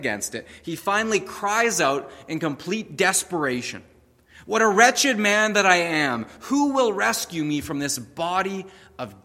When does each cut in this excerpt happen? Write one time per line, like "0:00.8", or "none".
none